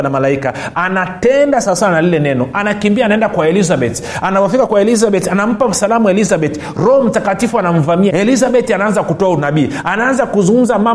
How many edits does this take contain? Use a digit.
1